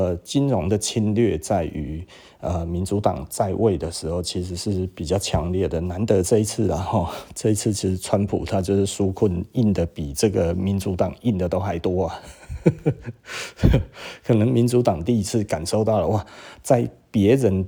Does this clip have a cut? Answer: no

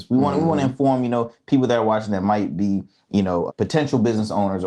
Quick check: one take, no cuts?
no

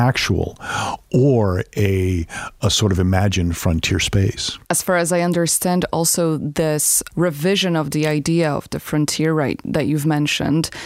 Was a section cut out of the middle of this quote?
yes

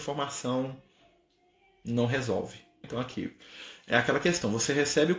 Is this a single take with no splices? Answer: no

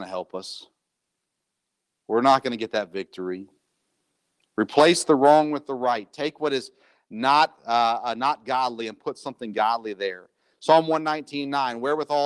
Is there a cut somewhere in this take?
no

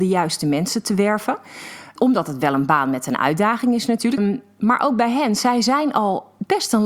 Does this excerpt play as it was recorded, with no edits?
no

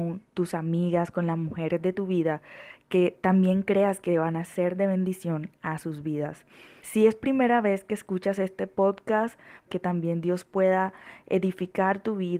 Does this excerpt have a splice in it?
yes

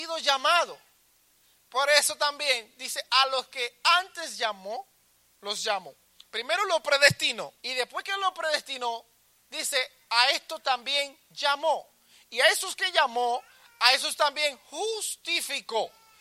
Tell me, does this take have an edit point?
yes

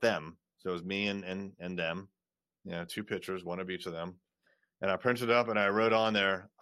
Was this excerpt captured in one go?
yes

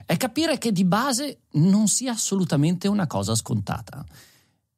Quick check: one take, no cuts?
yes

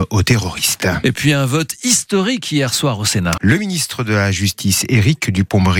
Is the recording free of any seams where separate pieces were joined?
no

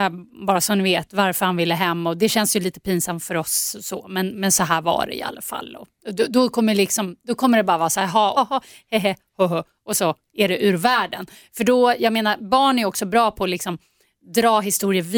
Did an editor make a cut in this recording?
yes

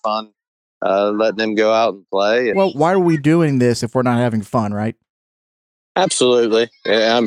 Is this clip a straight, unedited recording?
no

